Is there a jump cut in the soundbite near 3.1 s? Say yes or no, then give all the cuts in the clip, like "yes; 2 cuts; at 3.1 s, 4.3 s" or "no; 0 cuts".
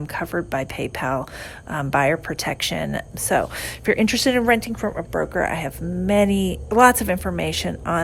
yes; 1 cut; at 3.1 s